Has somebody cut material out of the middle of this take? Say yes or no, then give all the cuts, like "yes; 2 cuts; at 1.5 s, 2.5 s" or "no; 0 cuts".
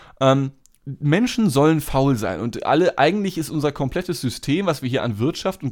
no; 0 cuts